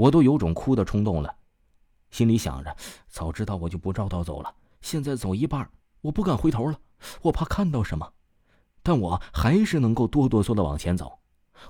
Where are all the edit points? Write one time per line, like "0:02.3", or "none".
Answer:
0:10.4